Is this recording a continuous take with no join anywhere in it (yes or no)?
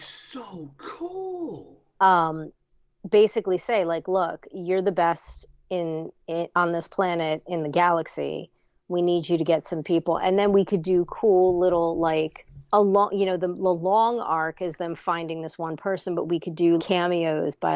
no